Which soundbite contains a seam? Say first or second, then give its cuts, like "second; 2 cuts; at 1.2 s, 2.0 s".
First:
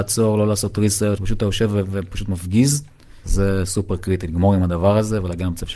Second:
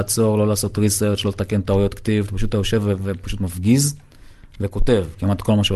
first; 2 cuts; at 1.2 s, 3.2 s